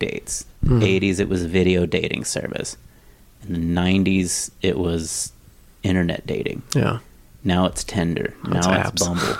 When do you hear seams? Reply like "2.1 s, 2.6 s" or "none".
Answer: none